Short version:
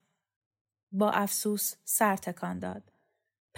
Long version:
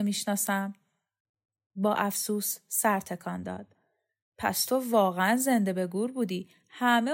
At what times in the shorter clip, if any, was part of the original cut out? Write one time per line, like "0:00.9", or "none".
none